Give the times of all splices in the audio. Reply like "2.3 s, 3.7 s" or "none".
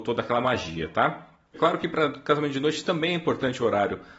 1.5 s